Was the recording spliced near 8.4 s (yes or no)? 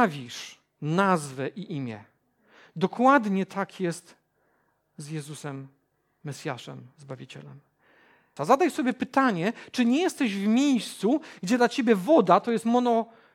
yes